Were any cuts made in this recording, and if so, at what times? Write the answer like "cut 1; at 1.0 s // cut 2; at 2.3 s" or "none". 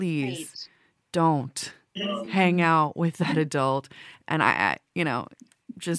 none